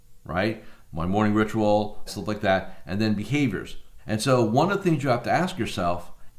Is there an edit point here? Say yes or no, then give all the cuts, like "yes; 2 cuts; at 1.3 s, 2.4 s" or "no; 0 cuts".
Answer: yes; 2 cuts; at 2.1 s, 4.0 s